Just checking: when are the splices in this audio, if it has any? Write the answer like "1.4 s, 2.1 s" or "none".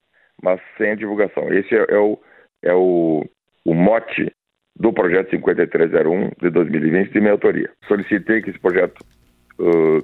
7.8 s